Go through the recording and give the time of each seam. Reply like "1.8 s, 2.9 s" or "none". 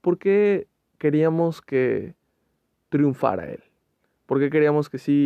none